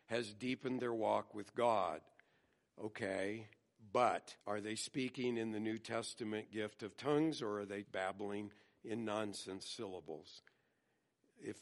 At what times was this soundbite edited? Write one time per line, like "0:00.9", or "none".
0:04.4
0:07.8